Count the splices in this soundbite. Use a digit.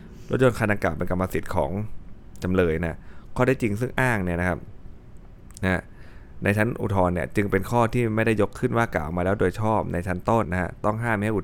1